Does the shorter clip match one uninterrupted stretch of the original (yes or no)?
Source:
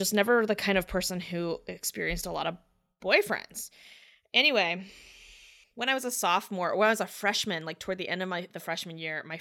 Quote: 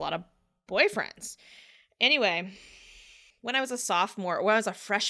yes